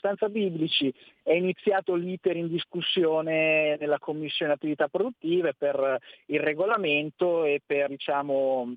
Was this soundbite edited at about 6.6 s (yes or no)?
no